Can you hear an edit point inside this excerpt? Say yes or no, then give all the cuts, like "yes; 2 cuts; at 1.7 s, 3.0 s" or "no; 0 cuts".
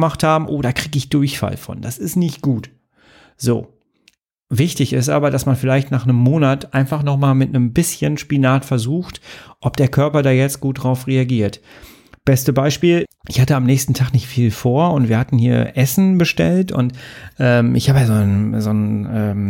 yes; 1 cut; at 13.0 s